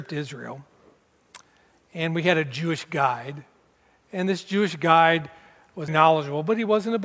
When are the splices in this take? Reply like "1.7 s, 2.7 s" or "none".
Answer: 5.9 s